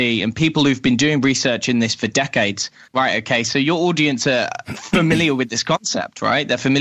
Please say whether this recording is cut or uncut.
cut